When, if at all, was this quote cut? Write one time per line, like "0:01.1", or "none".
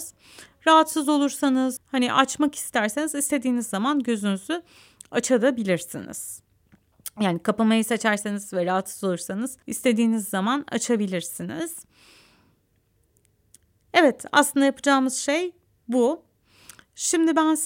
0:01.8
0:09.6